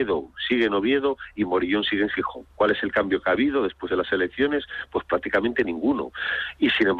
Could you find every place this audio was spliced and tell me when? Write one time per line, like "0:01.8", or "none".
0:02.5